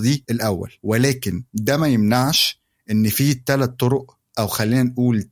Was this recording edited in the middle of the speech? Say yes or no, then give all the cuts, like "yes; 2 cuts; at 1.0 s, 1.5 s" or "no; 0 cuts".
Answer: yes; 1 cut; at 1.5 s